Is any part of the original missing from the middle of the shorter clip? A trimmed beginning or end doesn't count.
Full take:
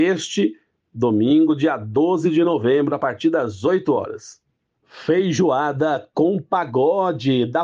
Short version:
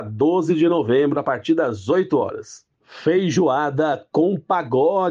yes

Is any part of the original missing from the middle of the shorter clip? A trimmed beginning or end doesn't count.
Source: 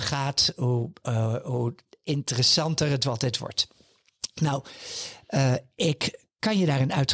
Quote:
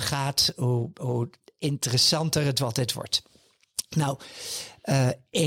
yes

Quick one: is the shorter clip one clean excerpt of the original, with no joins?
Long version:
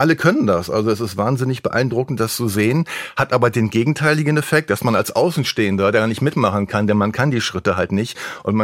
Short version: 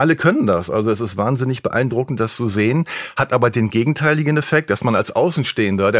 yes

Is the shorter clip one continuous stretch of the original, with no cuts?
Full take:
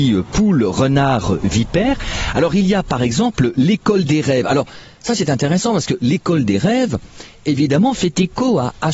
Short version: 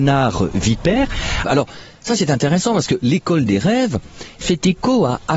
no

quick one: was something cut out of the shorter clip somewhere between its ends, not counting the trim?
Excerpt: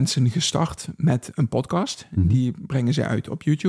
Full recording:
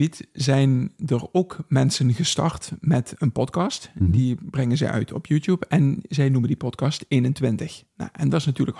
no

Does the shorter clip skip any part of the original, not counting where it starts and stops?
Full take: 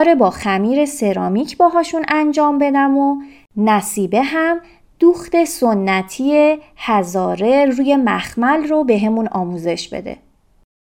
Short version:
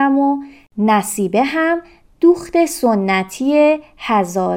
no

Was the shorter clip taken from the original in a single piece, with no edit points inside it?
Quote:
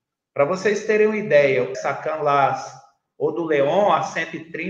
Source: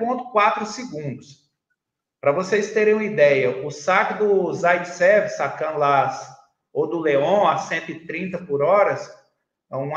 no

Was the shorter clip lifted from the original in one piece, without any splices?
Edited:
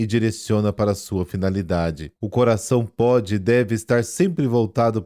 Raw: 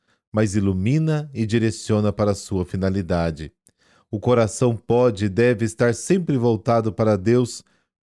no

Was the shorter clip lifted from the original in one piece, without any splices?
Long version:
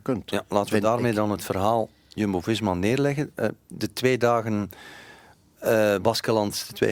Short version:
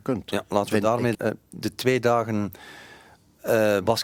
no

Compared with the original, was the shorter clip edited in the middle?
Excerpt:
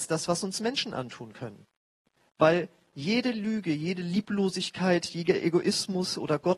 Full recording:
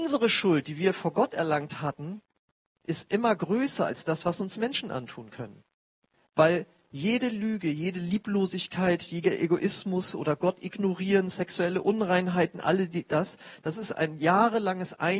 no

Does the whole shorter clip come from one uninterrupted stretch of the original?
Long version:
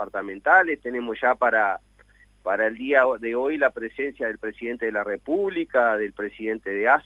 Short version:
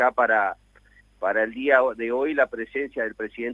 yes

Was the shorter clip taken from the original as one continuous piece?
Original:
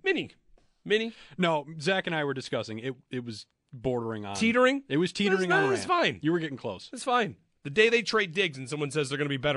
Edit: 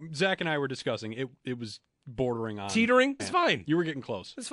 no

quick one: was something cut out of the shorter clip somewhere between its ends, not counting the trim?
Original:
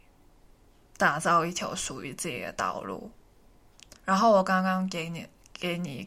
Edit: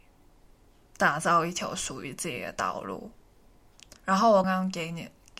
yes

